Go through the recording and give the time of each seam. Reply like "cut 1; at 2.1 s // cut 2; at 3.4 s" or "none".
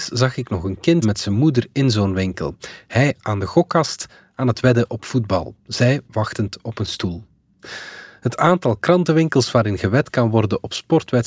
cut 1; at 1.0 s